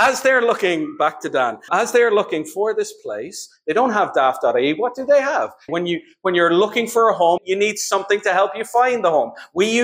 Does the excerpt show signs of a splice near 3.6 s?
no; 3 cuts; at 1.7 s, 5.7 s, 7.4 s

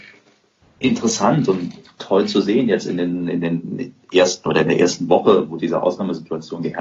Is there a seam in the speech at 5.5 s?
no; 0 cuts

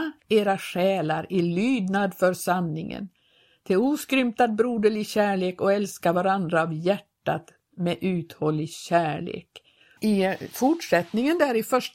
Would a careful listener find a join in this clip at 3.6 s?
no; 1 cut; at 10.0 s

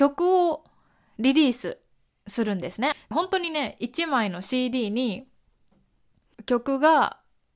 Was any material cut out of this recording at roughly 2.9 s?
yes; 1 cut; at 2.9 s

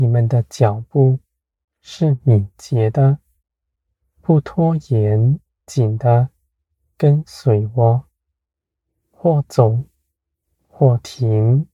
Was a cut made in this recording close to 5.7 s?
yes; 1 cut; at 5.7 s

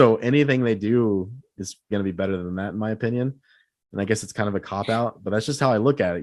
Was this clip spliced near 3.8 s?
no; 1 cut; at 1.9 s

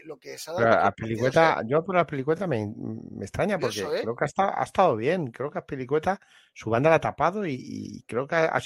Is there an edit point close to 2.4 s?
no; 0 cuts

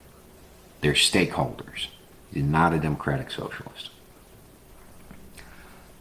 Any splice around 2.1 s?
yes; 1 cut; at 2.1 s

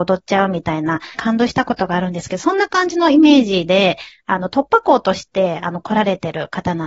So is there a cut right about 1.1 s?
yes; 1 cut; at 1.1 s

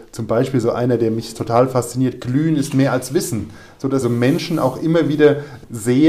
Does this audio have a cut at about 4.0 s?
yes; 1 cut; at 4.0 s

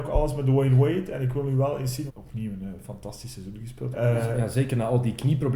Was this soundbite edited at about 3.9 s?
yes; 2 cuts; at 2.1 s, 3.9 s

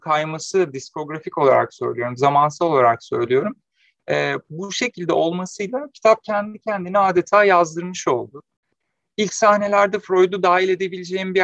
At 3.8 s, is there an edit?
no; 0 cuts

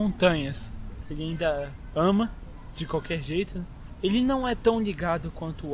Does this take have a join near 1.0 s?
yes; 1 cut; at 1.0 s

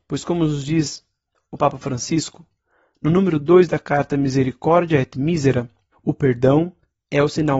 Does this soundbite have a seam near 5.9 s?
yes; 1 cut; at 5.9 s

